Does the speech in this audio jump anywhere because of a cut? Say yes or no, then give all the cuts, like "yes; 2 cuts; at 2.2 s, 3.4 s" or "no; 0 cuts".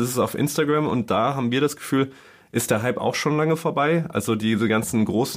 no; 0 cuts